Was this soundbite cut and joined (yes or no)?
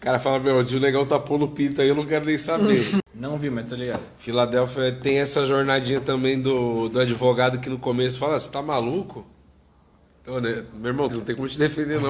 yes